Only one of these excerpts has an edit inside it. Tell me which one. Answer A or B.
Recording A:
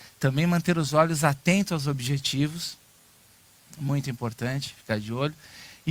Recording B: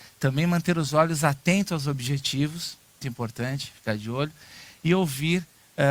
B